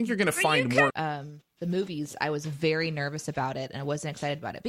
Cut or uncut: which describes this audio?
cut